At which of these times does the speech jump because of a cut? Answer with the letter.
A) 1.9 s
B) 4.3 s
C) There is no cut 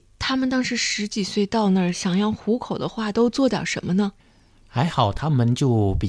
C